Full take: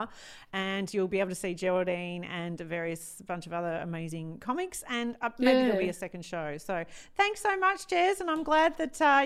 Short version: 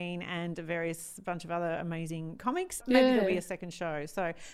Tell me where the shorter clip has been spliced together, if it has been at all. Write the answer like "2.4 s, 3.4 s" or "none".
2.8 s